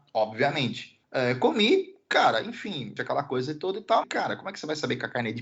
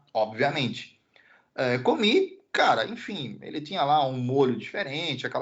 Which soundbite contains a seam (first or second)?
first